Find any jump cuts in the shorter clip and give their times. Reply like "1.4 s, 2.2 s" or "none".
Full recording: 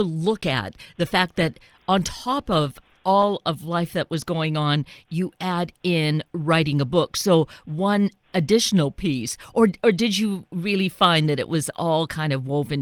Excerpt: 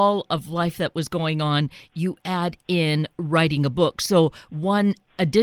none